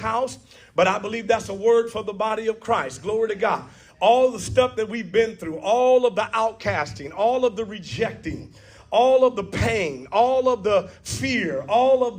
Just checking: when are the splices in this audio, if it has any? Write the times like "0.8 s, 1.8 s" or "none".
none